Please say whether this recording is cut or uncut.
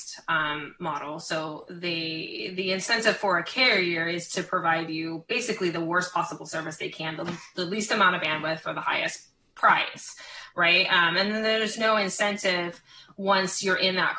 uncut